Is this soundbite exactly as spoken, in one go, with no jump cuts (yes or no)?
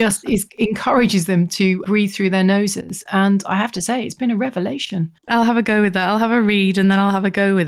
yes